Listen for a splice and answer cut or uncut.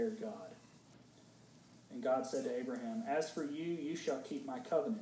uncut